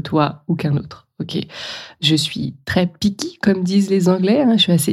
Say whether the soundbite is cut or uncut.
uncut